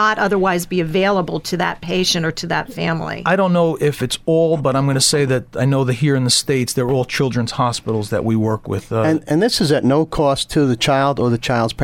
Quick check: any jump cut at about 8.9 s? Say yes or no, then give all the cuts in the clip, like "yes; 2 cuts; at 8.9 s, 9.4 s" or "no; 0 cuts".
no; 0 cuts